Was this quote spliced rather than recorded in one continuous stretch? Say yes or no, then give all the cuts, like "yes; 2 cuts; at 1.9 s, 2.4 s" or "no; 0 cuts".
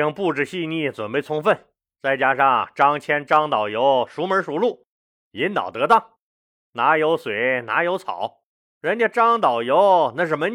no; 0 cuts